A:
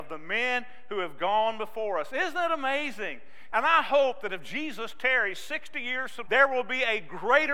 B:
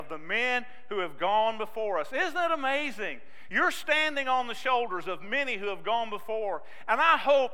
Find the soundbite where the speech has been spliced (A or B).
A